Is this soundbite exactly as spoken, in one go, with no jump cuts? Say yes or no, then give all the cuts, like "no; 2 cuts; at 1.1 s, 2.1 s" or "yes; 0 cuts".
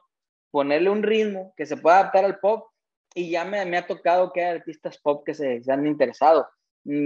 yes; 0 cuts